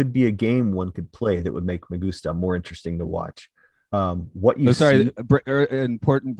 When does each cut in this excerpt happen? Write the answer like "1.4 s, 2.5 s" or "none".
none